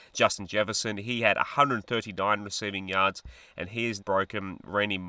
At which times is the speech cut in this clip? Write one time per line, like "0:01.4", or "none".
0:04.0

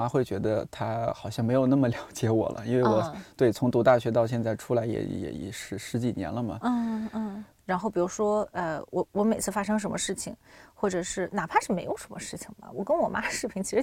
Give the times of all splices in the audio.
0:07.6

